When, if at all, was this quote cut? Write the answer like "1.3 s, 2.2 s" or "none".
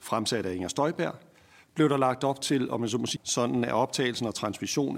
3.2 s